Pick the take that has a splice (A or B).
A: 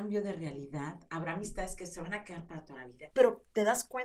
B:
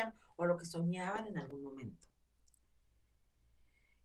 A